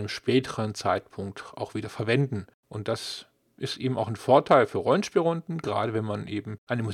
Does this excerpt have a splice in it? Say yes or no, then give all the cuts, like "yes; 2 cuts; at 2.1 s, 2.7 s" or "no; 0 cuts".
no; 0 cuts